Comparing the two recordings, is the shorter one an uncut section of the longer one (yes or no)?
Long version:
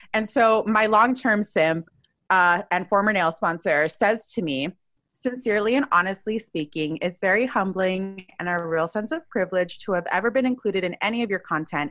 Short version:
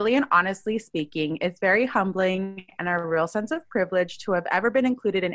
yes